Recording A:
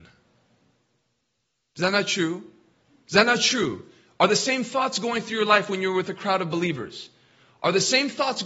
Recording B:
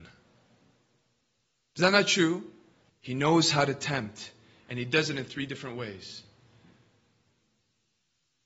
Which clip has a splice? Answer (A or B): B